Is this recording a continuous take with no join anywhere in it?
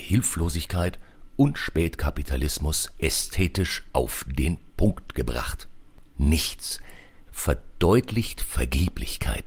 no; 2 cuts; at 6.1 s, 7.3 s

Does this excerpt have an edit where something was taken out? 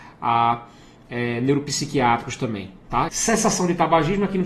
yes; 1 cut; at 3.1 s

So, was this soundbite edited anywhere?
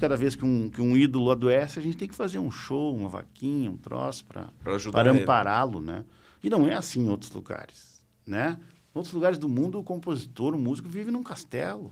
no; 0 cuts

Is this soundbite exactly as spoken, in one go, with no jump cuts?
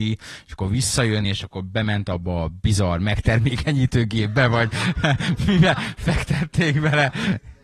yes; 0 cuts

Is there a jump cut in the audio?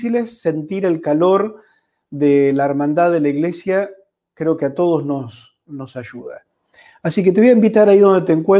no; 0 cuts

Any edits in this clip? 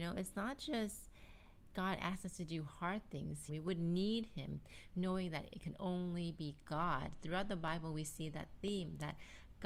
yes; 1 cut; at 3.5 s

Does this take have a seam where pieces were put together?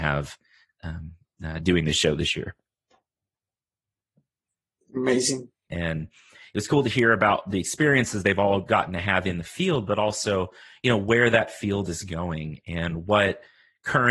yes; 1 cut; at 5.7 s

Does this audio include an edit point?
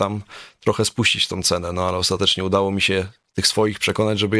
no; 0 cuts

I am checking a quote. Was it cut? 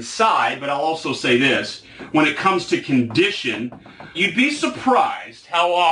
yes; 1 cut; at 4.1 s

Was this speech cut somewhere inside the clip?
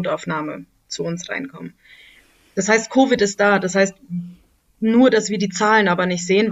no; 0 cuts

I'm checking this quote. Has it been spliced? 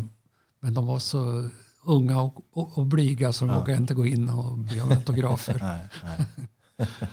no; 0 cuts

